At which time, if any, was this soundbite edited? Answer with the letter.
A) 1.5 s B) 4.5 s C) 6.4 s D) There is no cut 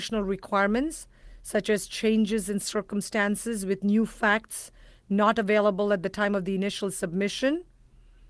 D